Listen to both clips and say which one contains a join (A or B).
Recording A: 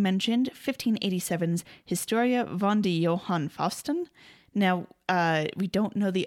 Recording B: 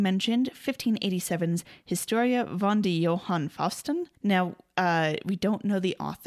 B